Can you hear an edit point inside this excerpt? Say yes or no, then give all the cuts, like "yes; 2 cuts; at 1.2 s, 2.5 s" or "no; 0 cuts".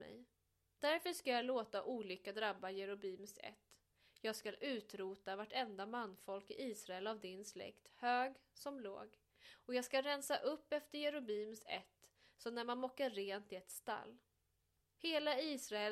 yes; 1 cut; at 14.8 s